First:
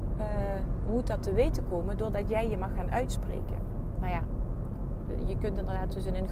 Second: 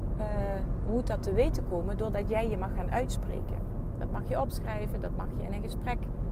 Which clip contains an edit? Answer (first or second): first